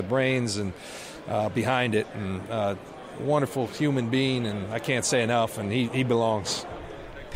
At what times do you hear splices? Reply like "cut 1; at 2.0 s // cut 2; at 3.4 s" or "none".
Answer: none

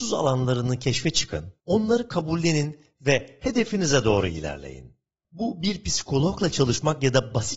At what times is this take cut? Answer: cut 1; at 1.6 s // cut 2; at 5.2 s

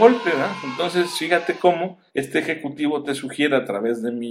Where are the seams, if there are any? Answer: cut 1; at 2.1 s

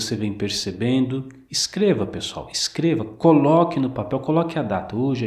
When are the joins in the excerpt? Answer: none

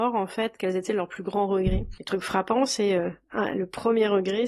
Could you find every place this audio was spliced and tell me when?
none

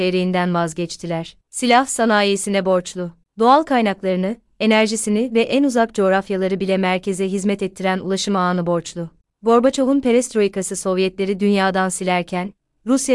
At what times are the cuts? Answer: cut 1; at 1.4 s // cut 2; at 9.3 s

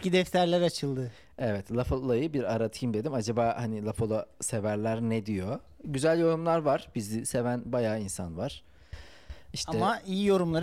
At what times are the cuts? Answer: none

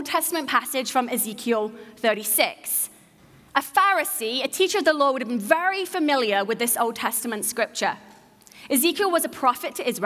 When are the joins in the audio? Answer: none

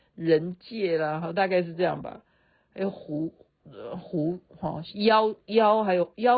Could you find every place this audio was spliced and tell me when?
none

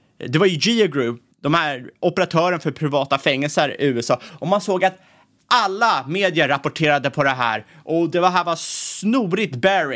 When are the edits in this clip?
cut 1; at 1.3 s

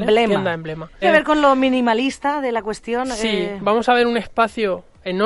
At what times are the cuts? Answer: cut 1; at 1.0 s

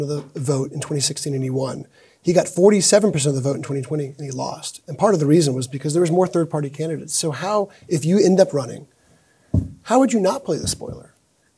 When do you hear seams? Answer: none

